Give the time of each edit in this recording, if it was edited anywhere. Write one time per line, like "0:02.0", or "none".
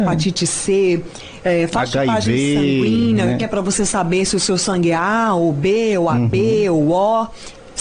none